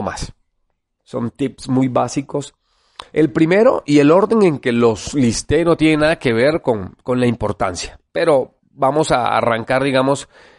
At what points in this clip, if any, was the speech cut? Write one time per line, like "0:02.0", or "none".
0:01.0
0:03.1